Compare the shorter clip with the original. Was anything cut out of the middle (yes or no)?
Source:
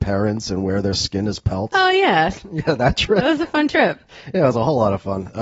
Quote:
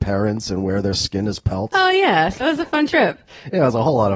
yes